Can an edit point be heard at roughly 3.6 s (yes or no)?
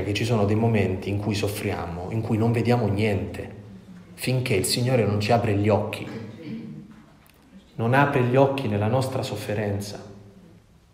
no